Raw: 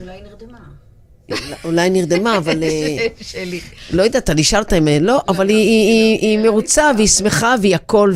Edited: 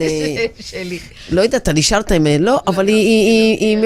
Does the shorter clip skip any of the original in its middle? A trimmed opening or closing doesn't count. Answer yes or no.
no